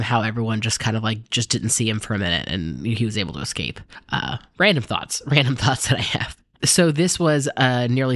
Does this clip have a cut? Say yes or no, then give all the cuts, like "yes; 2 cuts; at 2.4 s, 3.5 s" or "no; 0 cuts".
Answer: no; 0 cuts